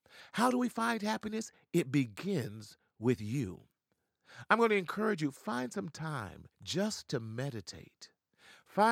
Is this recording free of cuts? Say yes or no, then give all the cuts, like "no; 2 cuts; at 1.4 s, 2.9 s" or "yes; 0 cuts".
no; 1 cut; at 6.5 s